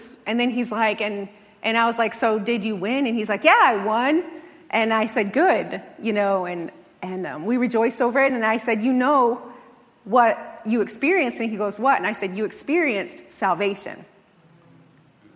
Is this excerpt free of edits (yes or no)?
yes